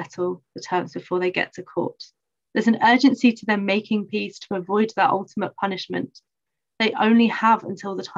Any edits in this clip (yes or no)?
yes